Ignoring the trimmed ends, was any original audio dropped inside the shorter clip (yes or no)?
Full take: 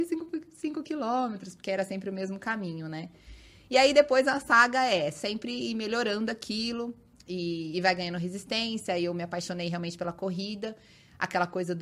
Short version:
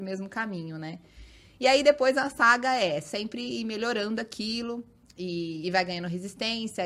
no